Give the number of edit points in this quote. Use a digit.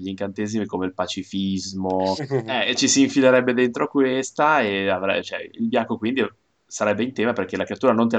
1